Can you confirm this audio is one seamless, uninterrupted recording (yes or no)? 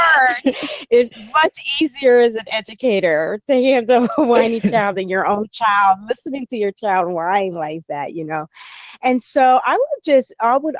yes